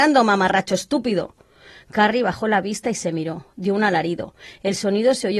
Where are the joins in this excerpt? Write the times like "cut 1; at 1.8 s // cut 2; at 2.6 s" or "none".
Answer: none